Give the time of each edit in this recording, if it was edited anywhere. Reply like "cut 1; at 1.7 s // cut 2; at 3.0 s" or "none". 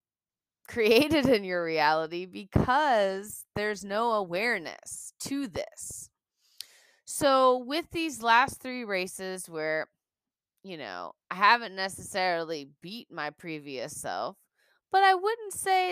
none